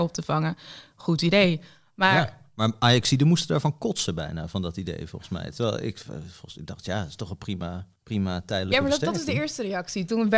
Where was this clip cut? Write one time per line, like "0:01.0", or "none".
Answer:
0:08.0